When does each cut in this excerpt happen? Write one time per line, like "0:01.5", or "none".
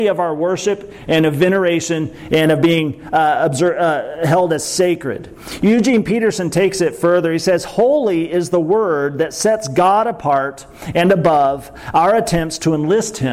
none